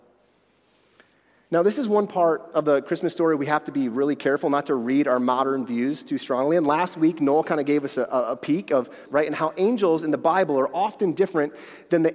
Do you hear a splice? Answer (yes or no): yes